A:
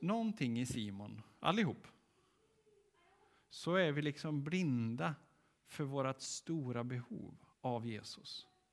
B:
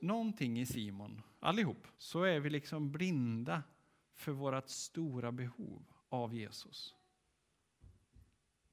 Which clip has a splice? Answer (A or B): B